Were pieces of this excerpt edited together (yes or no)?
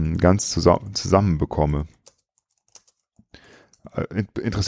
no